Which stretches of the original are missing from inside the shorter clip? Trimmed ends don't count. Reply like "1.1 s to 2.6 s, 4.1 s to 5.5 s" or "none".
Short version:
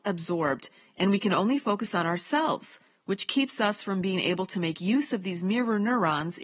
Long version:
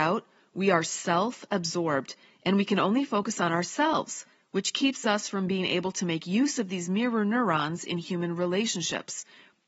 none

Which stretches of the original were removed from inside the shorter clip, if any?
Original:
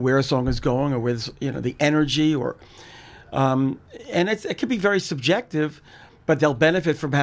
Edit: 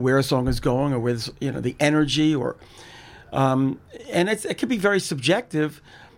none

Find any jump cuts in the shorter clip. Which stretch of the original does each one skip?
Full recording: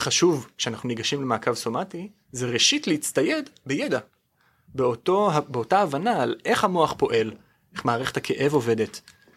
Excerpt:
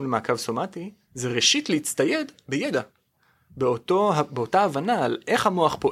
none

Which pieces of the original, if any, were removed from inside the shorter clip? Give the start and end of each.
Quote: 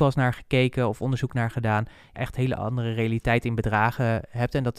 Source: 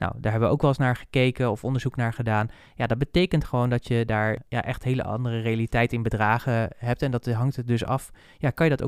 2.8 s to 4.6 s

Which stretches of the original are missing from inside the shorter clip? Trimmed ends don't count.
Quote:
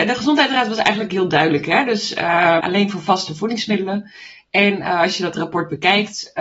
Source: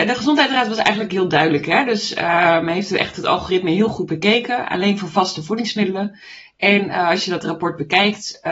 2.6 s to 4.7 s

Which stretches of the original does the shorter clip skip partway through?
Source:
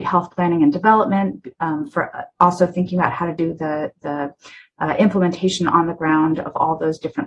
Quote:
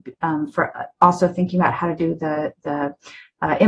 none

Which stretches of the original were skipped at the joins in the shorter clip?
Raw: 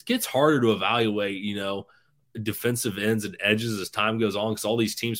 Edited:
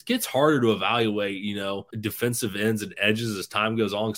1.9 s to 2.3 s

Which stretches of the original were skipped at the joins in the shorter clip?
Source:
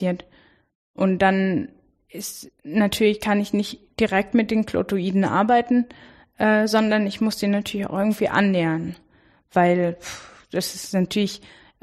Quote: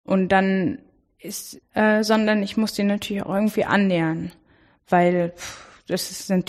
2.5 s to 6.3 s

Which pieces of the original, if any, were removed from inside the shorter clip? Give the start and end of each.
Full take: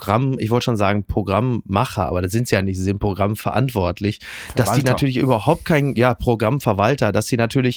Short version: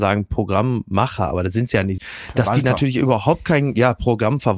2.8 s to 4.2 s

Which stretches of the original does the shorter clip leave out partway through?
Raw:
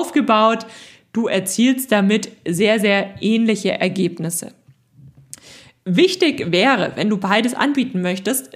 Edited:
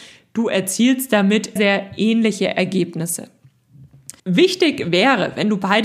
2.3 s to 2.8 s, 5.4 s to 5.8 s

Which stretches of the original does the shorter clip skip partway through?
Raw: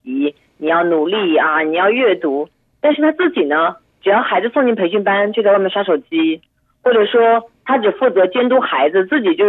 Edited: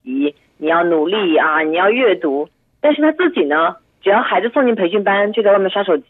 none

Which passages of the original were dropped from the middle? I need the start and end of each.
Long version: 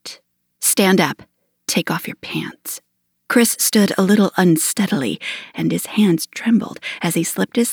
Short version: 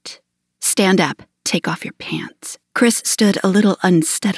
1.3 s to 1.6 s, 2.9 s to 3.2 s

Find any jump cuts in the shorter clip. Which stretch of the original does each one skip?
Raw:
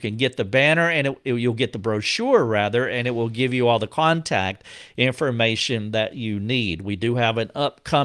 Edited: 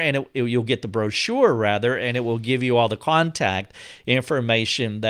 none

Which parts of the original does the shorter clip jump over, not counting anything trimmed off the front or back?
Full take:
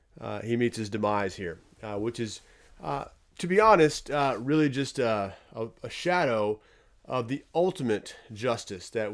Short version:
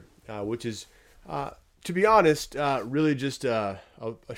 none

